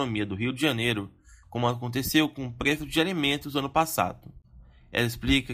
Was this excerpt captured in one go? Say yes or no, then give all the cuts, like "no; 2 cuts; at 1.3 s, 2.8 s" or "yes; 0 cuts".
no; 1 cut; at 1.4 s